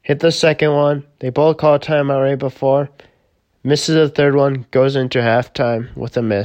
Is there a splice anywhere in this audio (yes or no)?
no